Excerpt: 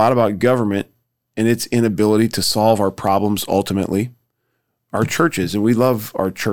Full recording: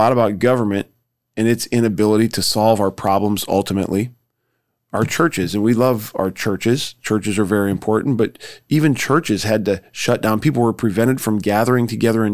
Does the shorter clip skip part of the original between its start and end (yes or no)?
no